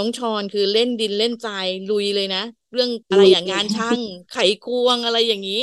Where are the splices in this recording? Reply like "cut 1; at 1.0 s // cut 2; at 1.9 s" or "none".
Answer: cut 1; at 3.0 s